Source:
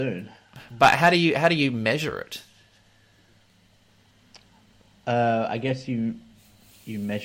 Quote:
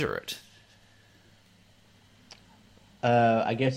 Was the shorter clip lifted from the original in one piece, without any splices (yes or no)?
yes